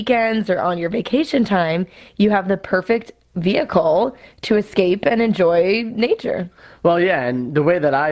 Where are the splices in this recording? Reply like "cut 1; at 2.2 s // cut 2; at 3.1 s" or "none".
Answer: none

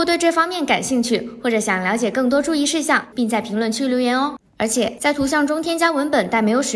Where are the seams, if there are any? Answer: cut 1; at 3.1 s // cut 2; at 4.5 s

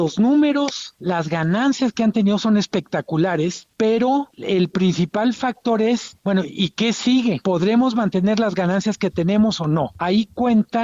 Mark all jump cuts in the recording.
none

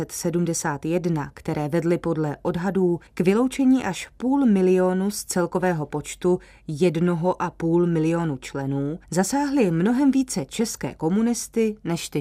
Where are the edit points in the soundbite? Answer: cut 1; at 3.1 s // cut 2; at 9.0 s

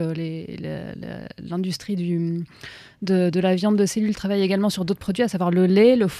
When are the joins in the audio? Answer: cut 1; at 4.1 s

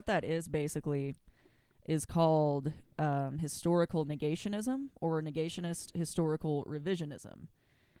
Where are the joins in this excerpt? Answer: none

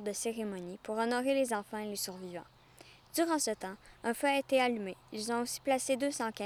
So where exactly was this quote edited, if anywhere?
none

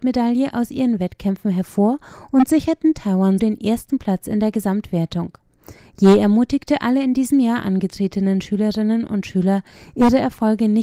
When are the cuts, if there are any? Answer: cut 1; at 3.4 s

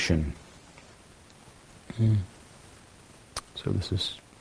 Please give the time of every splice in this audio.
none

